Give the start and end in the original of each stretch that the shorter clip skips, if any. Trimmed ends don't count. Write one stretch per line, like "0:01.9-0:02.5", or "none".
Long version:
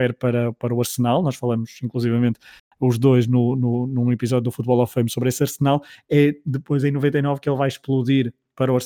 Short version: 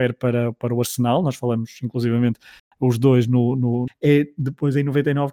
0:03.9-0:06.0